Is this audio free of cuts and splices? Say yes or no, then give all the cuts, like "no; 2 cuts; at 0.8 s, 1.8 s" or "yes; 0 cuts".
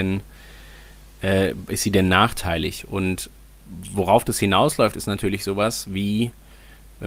yes; 0 cuts